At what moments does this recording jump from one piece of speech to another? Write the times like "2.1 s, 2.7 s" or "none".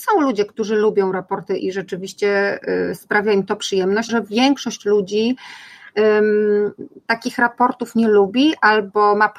1.6 s, 4.1 s

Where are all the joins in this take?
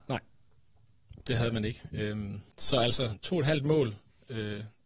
2.5 s

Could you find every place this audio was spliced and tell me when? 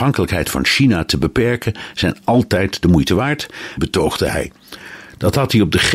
3.8 s

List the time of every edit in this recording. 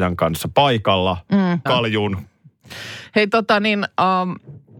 1.7 s

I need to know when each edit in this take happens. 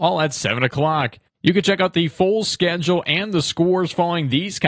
1.4 s

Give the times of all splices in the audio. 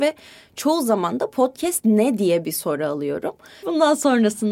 3.6 s

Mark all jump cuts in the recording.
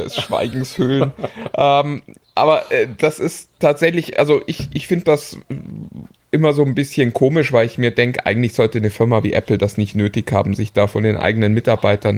none

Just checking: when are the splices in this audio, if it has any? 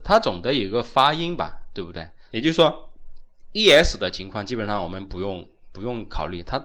2.3 s

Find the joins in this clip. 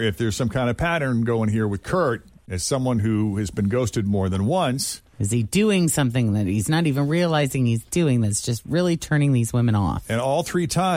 none

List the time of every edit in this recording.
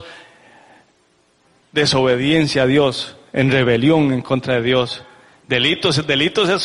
none

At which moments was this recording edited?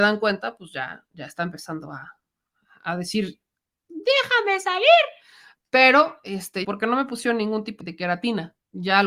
6.6 s, 7.8 s

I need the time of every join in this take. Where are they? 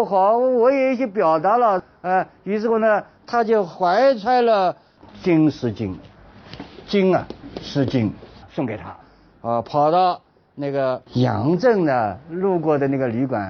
8.4 s, 11.1 s

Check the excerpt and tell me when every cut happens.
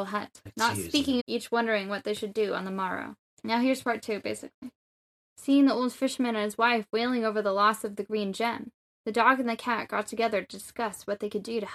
1.2 s, 3.3 s, 5.1 s

